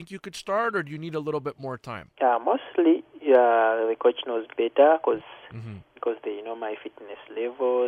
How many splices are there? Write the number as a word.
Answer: two